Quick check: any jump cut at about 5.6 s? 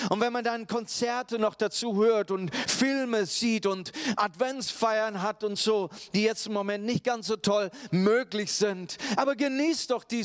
no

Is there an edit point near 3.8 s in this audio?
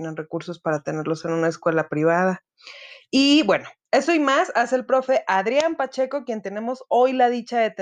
no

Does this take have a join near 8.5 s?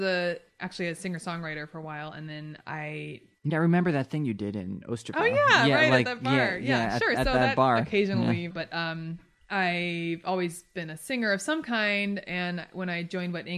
yes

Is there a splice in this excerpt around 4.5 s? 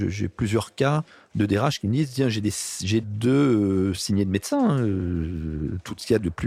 no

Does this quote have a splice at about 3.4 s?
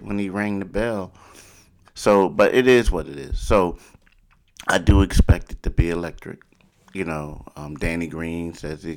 no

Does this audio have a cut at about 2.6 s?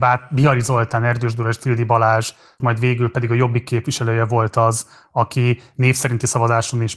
yes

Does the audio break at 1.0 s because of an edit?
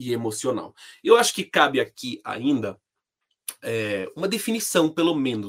no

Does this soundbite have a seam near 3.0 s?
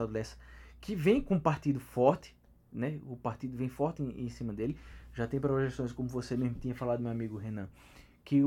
no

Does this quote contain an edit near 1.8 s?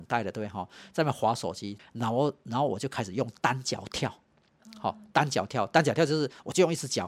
yes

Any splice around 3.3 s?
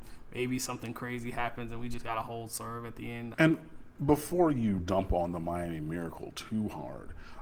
yes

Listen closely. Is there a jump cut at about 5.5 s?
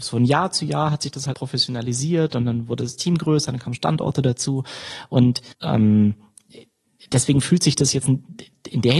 yes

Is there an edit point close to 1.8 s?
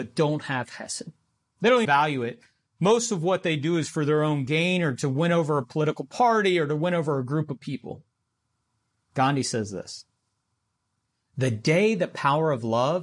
yes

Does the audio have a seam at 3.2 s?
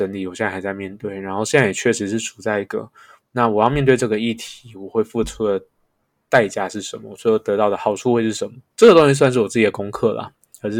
yes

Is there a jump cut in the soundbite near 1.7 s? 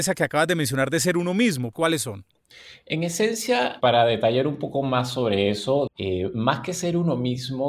yes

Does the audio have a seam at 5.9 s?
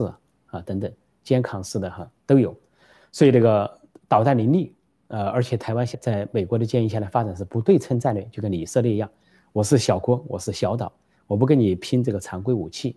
yes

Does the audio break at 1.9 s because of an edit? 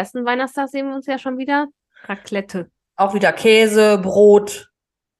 yes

